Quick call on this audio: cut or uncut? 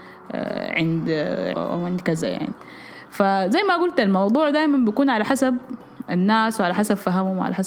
cut